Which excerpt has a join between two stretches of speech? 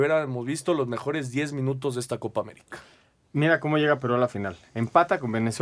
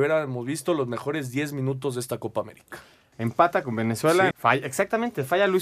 second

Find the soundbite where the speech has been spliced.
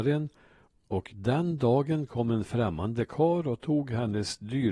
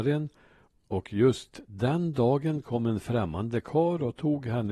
first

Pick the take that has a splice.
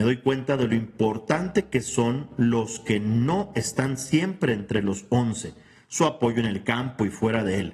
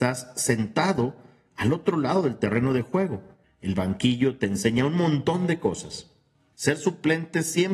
second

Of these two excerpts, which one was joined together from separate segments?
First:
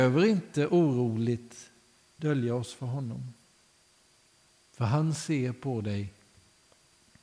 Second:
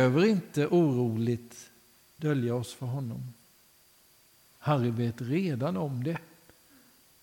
second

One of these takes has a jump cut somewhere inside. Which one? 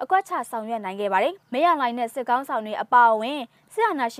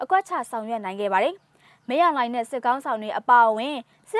first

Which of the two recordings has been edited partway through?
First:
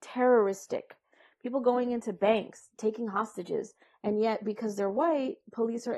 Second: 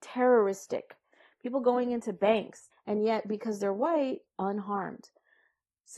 second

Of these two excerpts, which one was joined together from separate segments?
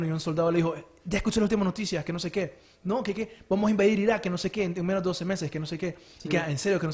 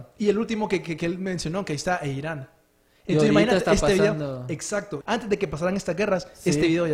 second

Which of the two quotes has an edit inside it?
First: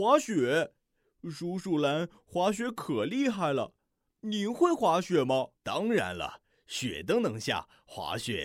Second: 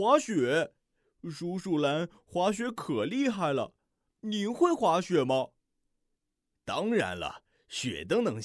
first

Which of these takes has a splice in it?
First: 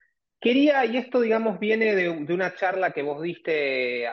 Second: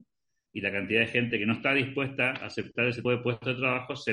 second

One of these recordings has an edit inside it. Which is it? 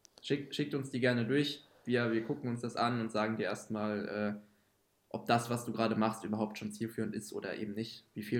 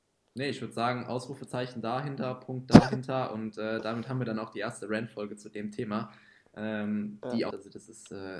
second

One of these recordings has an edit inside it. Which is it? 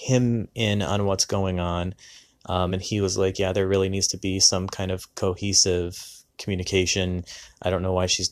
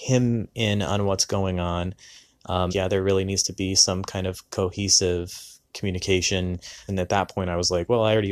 second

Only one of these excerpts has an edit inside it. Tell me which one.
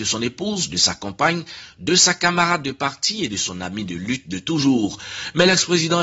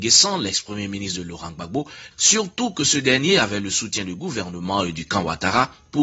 second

